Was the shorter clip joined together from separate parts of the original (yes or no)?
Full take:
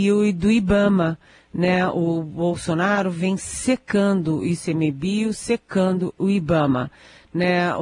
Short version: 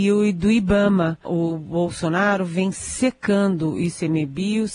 yes